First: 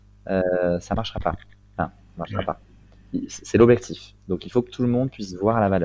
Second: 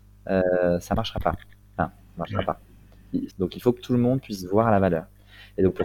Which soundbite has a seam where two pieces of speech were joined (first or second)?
second